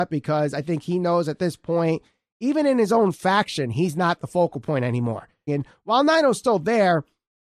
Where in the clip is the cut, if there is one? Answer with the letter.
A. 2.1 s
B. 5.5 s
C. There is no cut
B